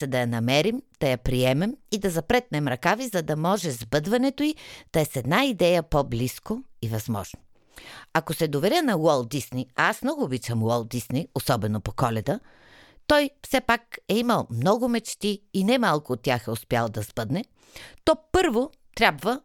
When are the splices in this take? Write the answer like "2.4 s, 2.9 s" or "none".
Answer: none

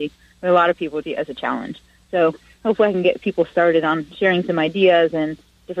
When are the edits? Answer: 1.0 s

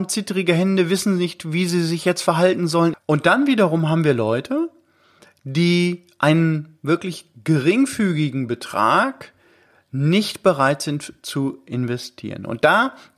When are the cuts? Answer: 2.9 s

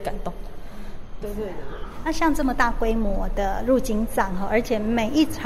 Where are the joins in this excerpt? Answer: 1.2 s

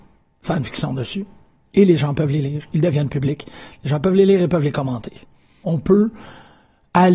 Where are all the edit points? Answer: 5.6 s

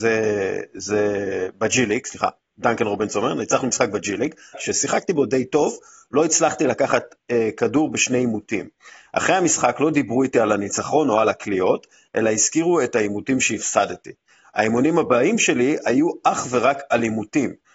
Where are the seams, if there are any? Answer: 4.5 s

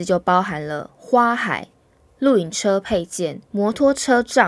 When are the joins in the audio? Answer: 3.4 s

